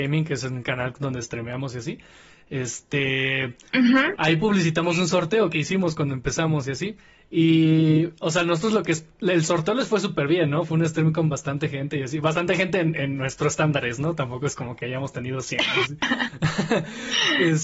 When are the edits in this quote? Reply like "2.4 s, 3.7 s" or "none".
none